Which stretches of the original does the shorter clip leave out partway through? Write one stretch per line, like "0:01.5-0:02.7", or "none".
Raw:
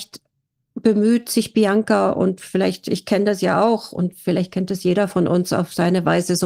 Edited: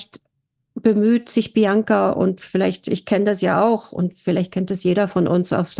none